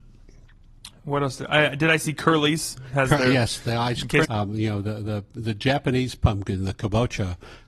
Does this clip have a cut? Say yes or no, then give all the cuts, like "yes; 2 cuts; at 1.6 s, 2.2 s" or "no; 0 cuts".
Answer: yes; 1 cut; at 4.2 s